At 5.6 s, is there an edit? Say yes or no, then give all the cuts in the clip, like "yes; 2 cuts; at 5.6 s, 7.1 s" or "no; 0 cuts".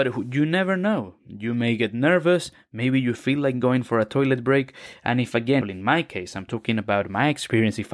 yes; 1 cut; at 5.6 s